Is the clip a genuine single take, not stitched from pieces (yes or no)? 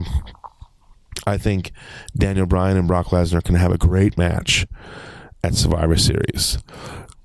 yes